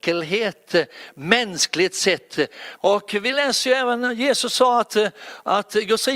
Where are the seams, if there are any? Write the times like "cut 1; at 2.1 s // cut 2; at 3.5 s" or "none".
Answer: cut 1; at 2.8 s